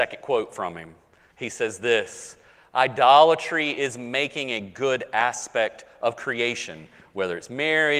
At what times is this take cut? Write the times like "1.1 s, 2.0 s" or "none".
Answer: 1.3 s